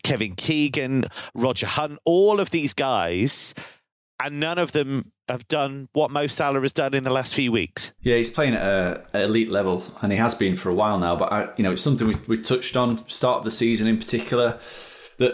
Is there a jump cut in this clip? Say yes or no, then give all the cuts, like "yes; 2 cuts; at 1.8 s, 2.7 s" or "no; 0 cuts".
no; 0 cuts